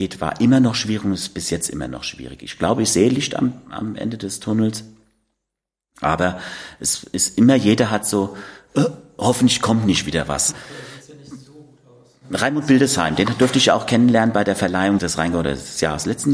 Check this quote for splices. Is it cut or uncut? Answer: cut